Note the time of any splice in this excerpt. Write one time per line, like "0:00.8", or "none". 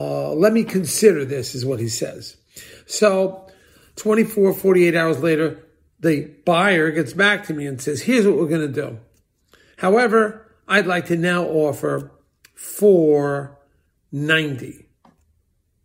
0:09.7